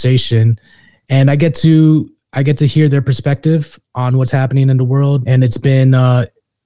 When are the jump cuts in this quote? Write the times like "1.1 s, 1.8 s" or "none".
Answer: 5.2 s